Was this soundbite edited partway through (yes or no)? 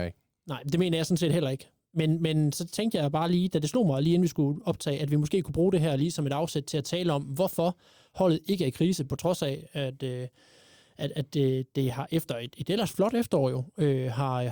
no